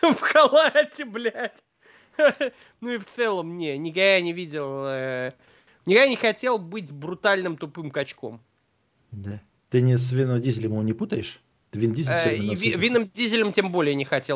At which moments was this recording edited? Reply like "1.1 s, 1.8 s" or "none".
none